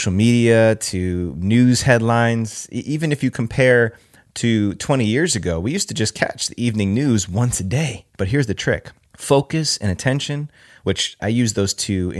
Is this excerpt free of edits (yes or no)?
no